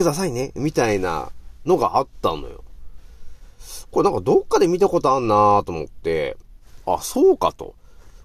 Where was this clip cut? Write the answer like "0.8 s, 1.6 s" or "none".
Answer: none